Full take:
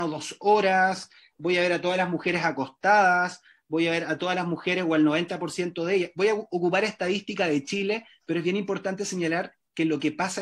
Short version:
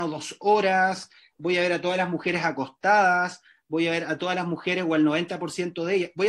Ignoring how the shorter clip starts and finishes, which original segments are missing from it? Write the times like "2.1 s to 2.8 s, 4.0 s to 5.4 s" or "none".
none